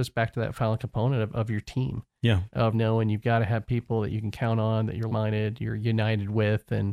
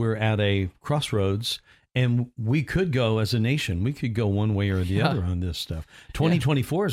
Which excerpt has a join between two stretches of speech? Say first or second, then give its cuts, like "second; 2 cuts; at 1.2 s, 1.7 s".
first; 2 cuts; at 2.7 s, 5.1 s